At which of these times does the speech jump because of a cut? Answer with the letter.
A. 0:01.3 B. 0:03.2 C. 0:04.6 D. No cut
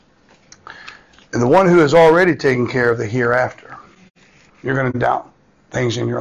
C